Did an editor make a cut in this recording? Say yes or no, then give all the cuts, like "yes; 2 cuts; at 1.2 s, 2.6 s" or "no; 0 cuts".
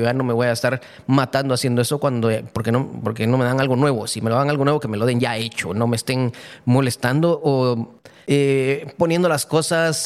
no; 0 cuts